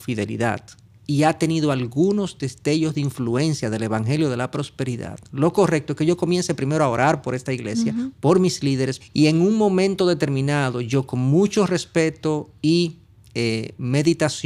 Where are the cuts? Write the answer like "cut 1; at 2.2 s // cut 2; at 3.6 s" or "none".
cut 1; at 9.0 s